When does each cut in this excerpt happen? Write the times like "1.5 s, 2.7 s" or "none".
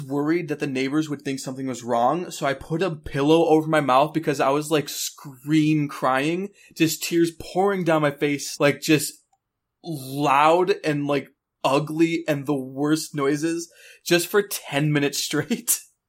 8.6 s